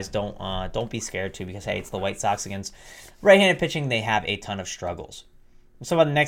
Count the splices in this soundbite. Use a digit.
0